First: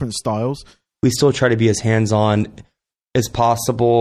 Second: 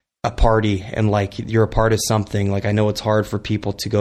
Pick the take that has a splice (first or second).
first